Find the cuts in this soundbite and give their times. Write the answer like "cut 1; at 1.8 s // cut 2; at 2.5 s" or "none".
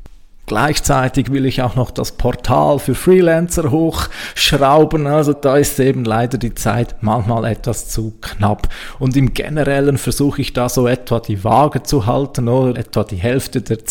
cut 1; at 5.3 s // cut 2; at 12.8 s